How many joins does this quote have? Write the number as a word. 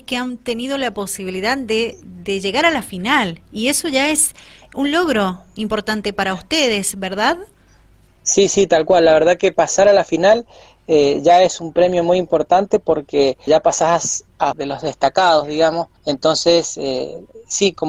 three